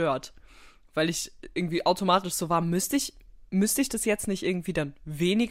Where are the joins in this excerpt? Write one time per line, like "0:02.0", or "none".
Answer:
none

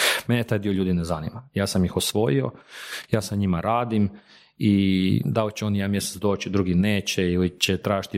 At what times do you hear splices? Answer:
none

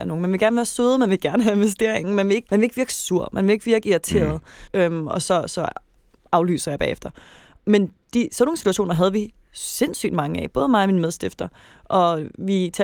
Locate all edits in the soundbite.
0:02.5
0:04.7

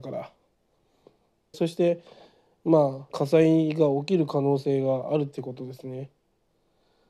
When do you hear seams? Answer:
0:01.5
0:03.1

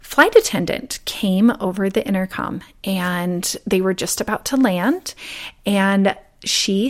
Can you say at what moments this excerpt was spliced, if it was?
none

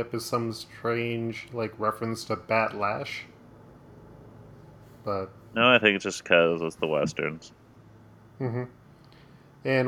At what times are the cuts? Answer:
none

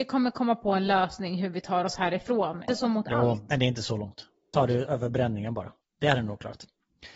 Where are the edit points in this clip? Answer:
0:02.7
0:04.5
0:05.8

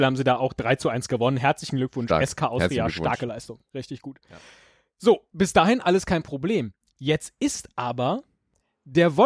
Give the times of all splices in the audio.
none

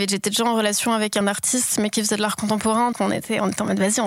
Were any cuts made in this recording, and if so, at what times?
0:01.2
0:02.9

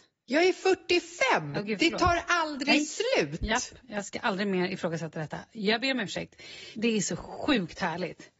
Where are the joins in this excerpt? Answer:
0:06.7

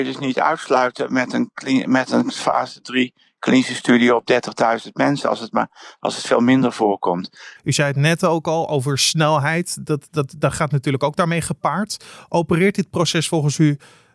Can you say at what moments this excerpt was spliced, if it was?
0:07.6

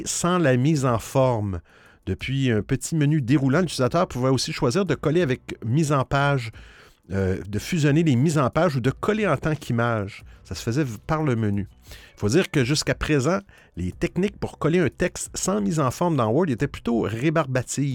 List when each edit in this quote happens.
0:12.1

